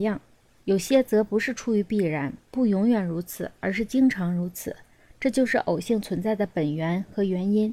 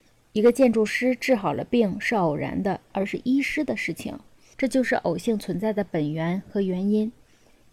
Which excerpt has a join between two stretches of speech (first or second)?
second